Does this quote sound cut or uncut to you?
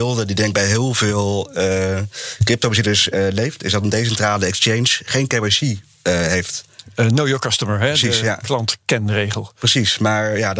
uncut